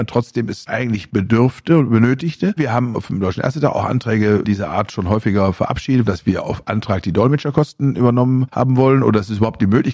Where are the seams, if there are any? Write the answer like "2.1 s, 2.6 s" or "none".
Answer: 2.6 s, 6.1 s